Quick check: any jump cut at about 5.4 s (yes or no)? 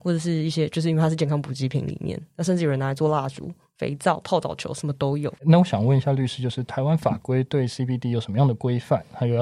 yes